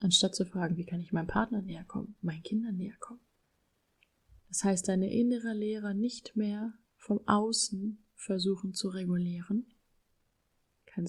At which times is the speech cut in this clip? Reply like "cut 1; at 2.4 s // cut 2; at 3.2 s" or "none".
cut 1; at 4.4 s // cut 2; at 6.9 s